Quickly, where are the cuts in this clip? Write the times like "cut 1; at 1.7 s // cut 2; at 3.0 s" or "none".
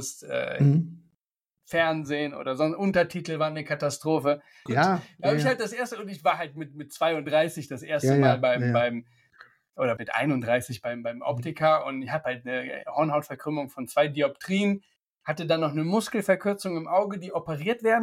cut 1; at 4.7 s // cut 2; at 10.0 s